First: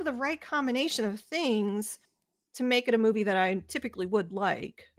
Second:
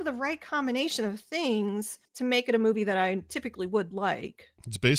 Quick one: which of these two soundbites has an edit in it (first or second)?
second